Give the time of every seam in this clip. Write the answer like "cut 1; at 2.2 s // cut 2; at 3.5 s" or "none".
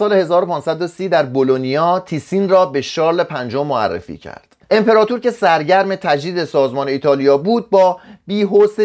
cut 1; at 4.6 s